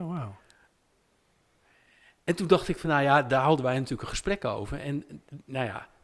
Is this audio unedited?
yes; 0 cuts

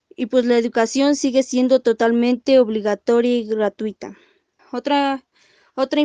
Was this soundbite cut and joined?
yes; 1 cut; at 4.6 s

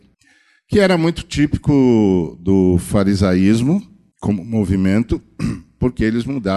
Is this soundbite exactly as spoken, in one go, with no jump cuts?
yes; 0 cuts

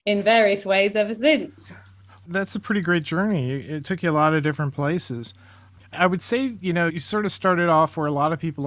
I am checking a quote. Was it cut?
yes; 1 cut; at 6.9 s

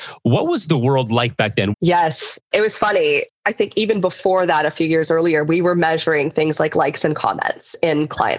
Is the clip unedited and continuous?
no; 1 cut; at 1.7 s

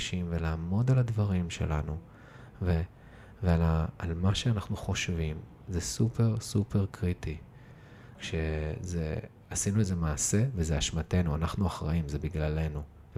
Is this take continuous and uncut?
no; 1 cut; at 8.2 s

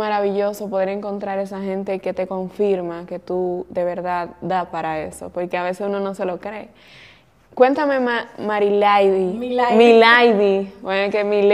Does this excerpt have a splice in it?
no; 0 cuts

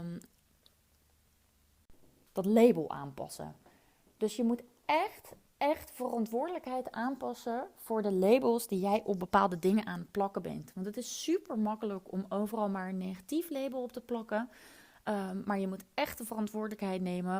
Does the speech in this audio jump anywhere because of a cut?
no; 0 cuts

